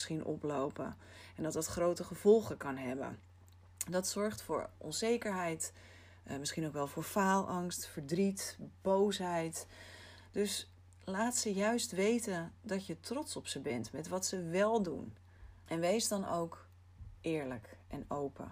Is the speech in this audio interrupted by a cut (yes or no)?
yes